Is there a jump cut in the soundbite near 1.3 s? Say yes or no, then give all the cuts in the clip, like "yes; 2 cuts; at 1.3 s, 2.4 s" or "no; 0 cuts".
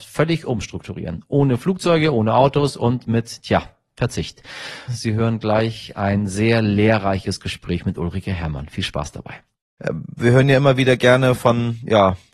no; 2 cuts; at 4.9 s, 9.8 s